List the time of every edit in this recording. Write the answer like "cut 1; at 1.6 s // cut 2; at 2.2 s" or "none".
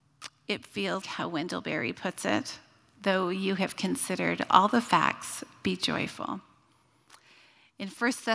cut 1; at 1.0 s